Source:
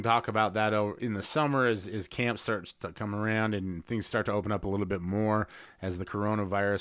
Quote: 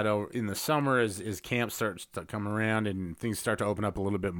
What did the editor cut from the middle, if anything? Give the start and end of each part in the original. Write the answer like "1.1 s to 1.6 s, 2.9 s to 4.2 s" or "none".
none